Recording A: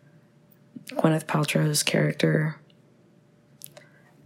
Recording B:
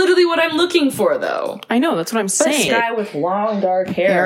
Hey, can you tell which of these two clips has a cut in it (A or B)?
B